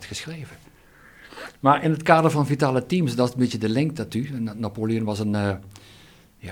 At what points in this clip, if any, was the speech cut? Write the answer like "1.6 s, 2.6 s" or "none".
none